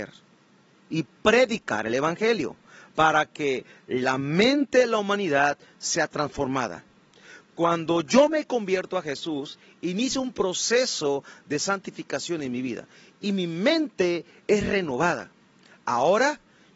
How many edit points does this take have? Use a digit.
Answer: 0